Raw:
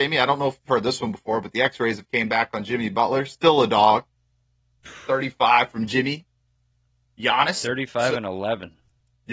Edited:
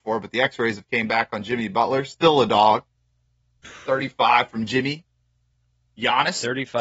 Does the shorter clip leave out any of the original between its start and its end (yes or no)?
no